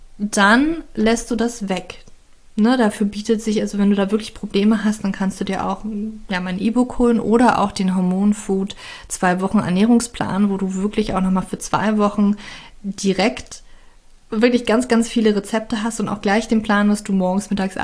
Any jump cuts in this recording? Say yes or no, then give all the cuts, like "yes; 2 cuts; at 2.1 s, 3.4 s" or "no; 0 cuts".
no; 0 cuts